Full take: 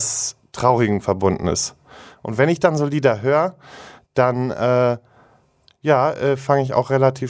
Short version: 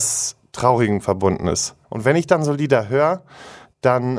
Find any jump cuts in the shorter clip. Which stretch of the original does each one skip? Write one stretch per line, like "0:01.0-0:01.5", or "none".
0:01.8-0:02.2